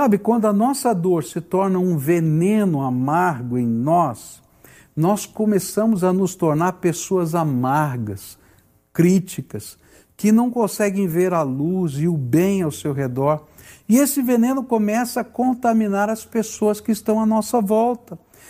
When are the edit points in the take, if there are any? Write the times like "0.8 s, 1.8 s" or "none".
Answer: none